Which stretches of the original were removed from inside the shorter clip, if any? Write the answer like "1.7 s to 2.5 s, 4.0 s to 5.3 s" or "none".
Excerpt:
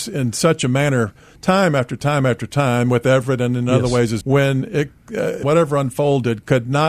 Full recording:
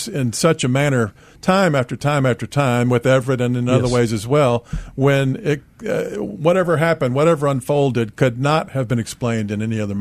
4.2 s to 4.9 s, 6.1 s to 7.1 s